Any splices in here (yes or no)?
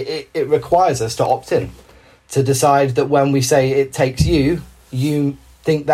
no